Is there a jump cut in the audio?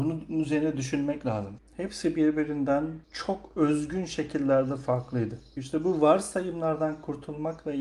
yes; 3 cuts; at 1.6 s, 3.0 s, 5.6 s

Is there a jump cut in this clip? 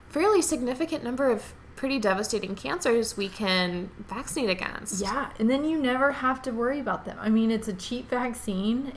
no; 0 cuts

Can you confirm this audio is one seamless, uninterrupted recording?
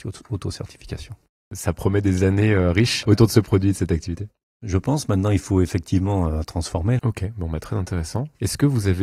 no; 1 cut; at 7.0 s

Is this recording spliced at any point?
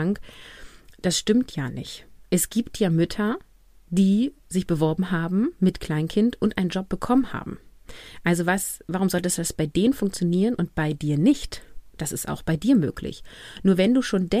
yes; 1 cut; at 4.4 s

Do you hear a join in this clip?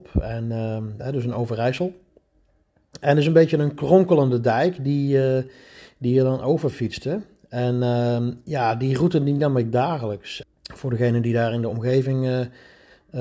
yes; 1 cut; at 10.4 s

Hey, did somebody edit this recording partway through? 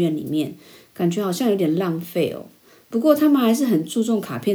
no; 0 cuts

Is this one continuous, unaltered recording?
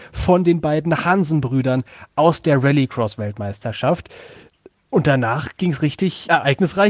yes; 0 cuts

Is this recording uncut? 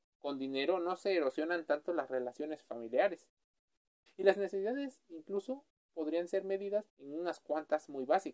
no; 2 cuts; at 4.1 s, 6.9 s

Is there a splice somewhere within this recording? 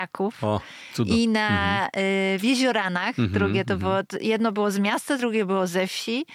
no; 0 cuts

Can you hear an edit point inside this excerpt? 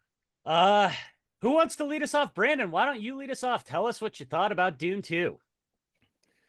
no; 0 cuts

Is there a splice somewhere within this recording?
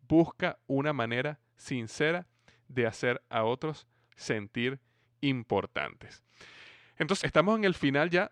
yes; 1 cut; at 7.2 s

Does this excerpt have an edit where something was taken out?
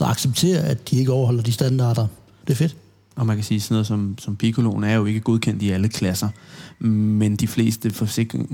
yes; 1 cut; at 2.4 s

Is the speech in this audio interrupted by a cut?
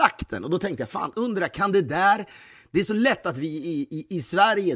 no; 0 cuts

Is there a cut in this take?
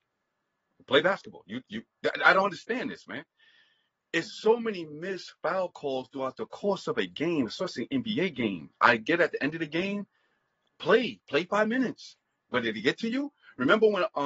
no; 0 cuts

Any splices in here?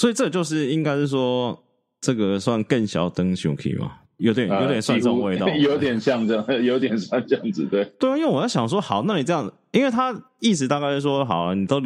no; 0 cuts

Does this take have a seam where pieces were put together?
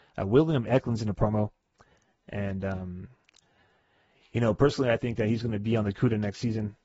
no; 0 cuts

